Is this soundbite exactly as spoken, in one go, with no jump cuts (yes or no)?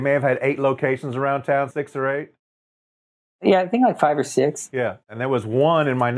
no